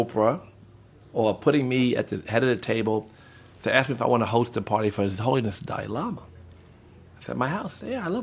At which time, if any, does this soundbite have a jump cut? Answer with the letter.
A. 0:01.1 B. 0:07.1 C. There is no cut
C